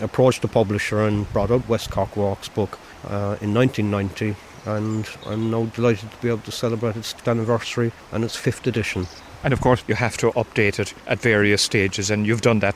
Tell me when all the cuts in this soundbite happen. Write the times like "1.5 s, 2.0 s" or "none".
9.8 s